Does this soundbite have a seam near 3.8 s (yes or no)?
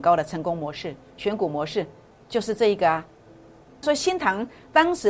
yes